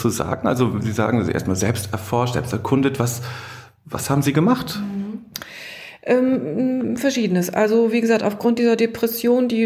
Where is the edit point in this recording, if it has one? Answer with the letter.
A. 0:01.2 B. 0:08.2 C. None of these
C